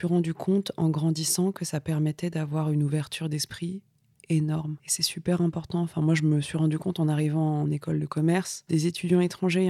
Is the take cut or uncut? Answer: uncut